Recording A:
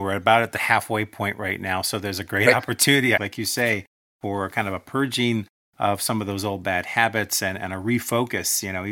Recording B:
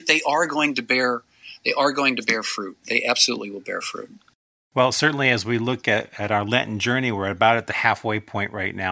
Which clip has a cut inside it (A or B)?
A